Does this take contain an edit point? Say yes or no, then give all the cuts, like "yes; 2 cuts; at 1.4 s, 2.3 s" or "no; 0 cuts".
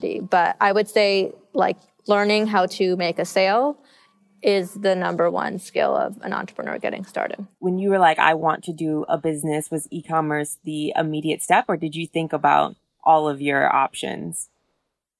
yes; 1 cut; at 7.5 s